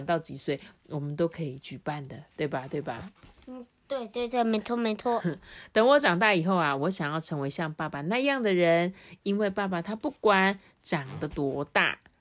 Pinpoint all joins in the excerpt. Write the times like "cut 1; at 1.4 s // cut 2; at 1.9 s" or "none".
none